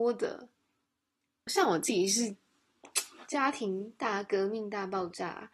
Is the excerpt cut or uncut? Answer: cut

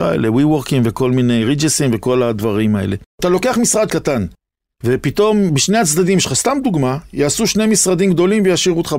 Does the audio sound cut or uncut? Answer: uncut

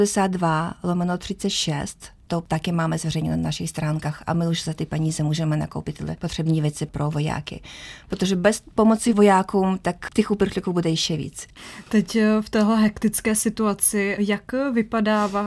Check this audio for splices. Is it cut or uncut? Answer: cut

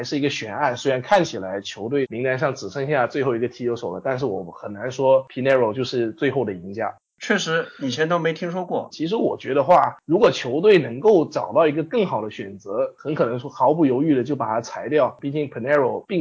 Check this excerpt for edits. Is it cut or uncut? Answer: cut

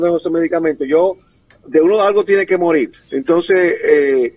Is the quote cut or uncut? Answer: cut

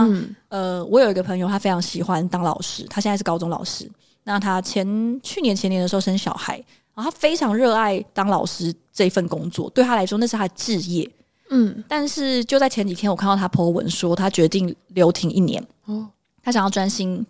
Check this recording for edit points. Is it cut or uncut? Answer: uncut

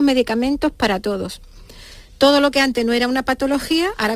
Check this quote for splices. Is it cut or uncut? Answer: uncut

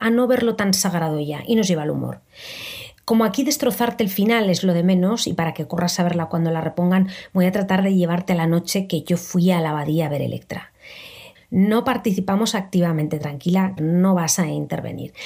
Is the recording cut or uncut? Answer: cut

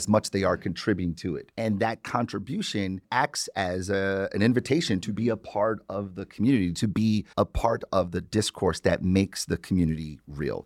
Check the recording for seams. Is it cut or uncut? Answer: uncut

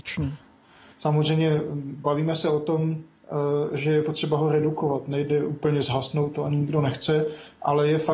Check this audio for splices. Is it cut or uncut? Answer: cut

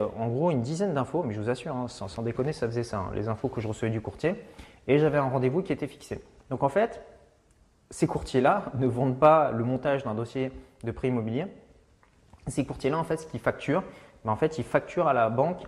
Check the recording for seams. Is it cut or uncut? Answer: uncut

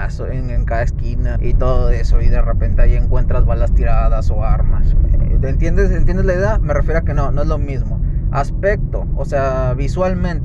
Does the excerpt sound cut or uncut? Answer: cut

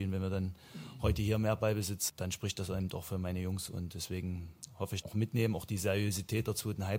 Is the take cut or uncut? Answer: cut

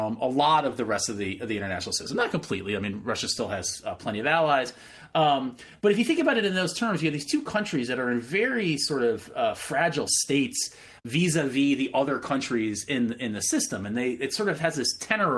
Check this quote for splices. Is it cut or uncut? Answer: uncut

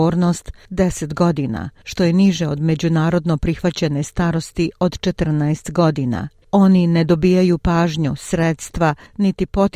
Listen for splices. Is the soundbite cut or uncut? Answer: cut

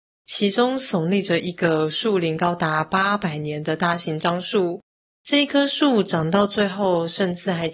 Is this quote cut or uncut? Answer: cut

